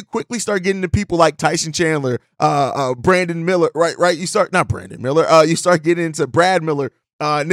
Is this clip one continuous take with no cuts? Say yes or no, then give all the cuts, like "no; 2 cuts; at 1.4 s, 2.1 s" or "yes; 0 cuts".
yes; 0 cuts